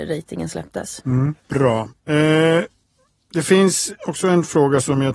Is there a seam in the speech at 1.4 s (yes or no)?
yes